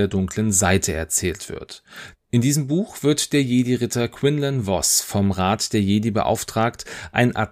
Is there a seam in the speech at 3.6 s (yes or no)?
no